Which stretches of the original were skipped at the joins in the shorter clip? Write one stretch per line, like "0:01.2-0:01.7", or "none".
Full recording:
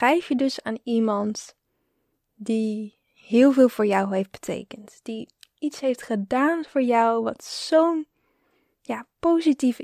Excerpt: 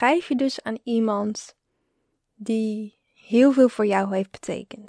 none